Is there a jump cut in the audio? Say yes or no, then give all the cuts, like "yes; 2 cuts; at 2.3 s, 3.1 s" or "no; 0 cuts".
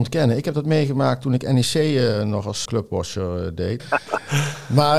yes; 2 cuts; at 2.6 s, 3.8 s